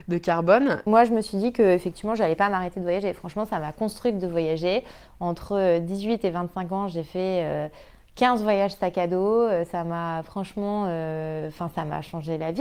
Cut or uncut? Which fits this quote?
uncut